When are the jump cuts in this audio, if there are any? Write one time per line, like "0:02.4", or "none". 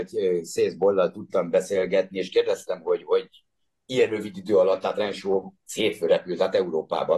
none